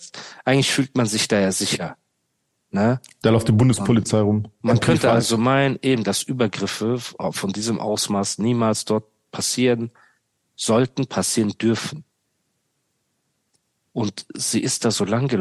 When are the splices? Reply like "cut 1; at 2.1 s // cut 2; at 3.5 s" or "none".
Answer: cut 1; at 4.6 s